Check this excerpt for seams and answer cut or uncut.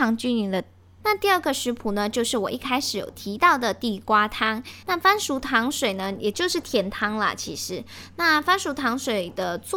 cut